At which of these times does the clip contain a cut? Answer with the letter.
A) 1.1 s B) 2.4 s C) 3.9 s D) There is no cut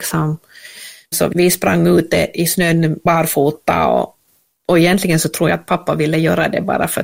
A